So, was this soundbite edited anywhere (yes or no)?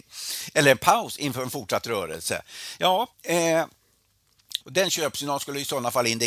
yes